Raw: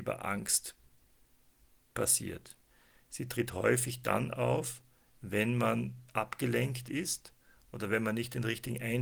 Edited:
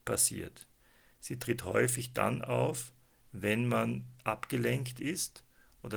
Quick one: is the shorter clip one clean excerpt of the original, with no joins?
yes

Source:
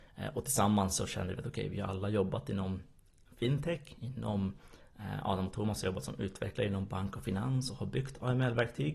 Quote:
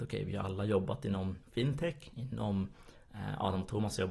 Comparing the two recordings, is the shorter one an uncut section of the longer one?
no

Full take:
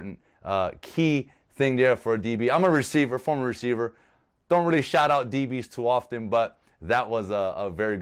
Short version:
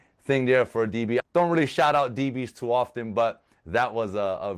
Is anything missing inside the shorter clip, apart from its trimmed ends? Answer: yes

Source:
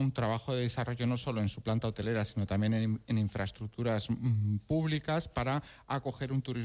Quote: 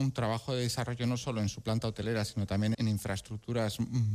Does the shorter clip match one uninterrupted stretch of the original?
no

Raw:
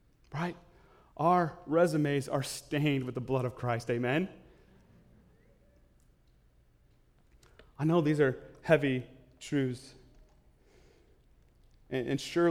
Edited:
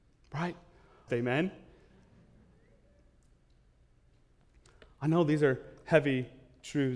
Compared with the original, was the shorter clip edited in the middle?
yes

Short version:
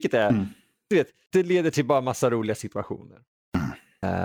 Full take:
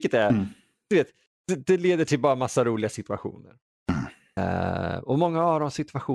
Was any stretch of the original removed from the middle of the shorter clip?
yes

